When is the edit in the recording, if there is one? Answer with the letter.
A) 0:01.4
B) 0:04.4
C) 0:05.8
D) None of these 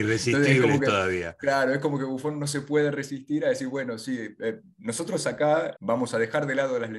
C